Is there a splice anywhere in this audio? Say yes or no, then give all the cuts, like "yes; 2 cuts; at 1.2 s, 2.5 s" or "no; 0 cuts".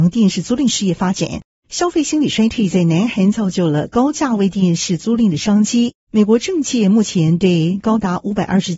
yes; 2 cuts; at 1.5 s, 6.1 s